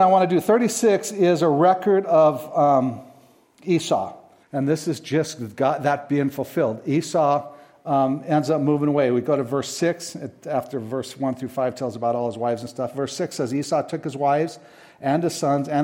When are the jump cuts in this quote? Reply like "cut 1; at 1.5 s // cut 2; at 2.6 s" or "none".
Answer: cut 1; at 4.4 s